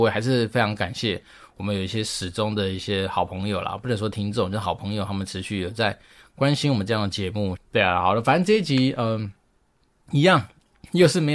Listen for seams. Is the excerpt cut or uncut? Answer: cut